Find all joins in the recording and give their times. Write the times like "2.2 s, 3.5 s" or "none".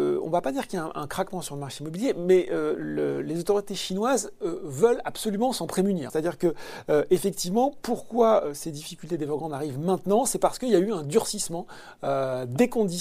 6.1 s